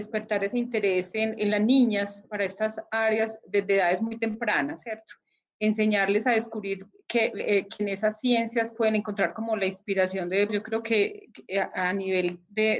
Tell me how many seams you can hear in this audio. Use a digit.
2